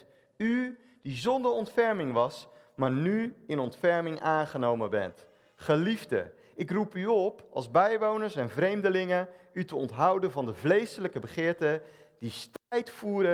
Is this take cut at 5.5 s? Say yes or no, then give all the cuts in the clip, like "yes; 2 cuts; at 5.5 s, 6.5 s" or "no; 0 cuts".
no; 0 cuts